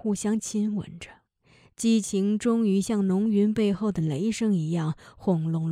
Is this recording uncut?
yes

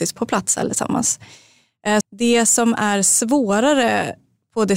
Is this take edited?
yes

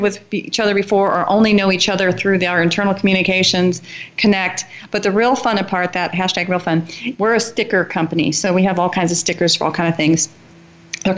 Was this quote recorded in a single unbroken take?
no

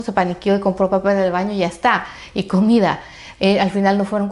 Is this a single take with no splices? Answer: no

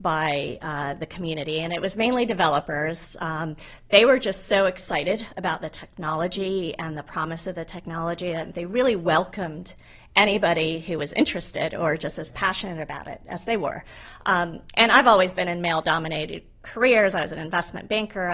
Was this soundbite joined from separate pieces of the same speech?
no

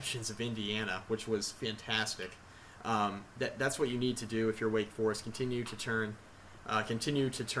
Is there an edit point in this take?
no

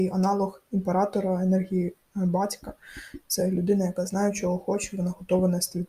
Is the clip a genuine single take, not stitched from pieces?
yes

